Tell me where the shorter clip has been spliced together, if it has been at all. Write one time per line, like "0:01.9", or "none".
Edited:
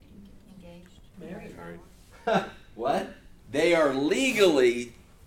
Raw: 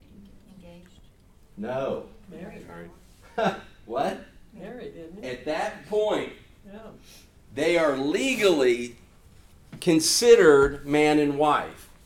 0:01.1
0:03.4